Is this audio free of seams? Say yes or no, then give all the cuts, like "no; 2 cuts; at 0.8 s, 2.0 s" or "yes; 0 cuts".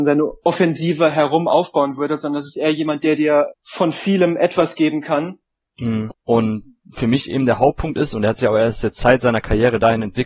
no; 2 cuts; at 3.5 s, 6.1 s